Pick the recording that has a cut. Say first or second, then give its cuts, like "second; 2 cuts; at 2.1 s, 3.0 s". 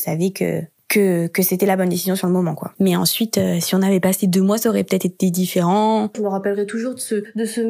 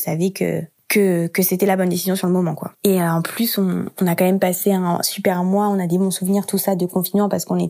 first; 2 cuts; at 2.8 s, 6.1 s